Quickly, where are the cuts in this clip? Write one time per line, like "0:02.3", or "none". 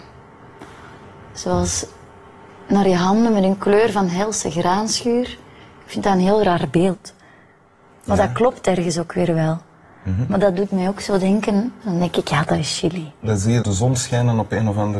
0:11.8
0:13.6